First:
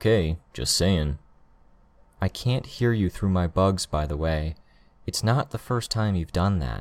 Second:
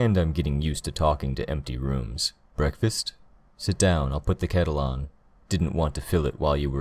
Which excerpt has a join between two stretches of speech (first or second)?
second